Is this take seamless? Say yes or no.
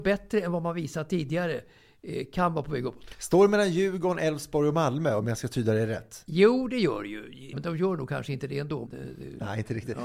no